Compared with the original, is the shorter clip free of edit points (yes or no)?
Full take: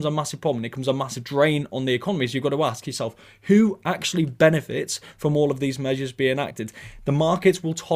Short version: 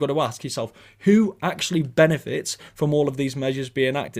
yes